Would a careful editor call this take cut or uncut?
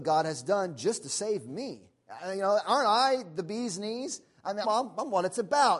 cut